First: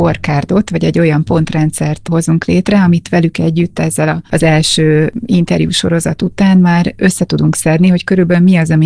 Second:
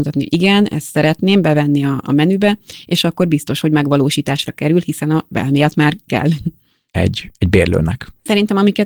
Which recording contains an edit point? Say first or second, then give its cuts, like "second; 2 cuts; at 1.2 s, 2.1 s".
second; 1 cut; at 6.9 s